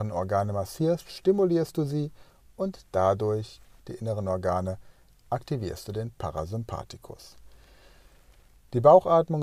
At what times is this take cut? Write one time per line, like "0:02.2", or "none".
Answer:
0:03.8